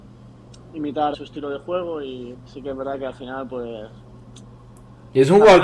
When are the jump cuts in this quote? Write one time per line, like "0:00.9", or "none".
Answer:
0:01.1
0:02.3